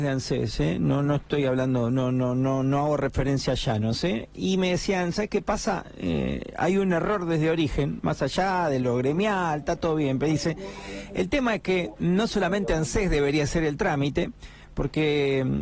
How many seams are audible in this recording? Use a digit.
0